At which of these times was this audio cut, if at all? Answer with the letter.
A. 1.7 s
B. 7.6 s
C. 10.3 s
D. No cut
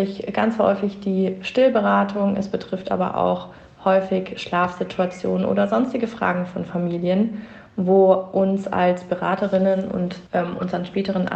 C